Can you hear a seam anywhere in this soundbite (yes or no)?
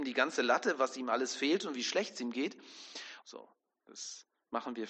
yes